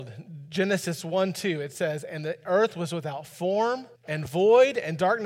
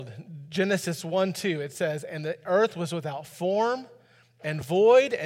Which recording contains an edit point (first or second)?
first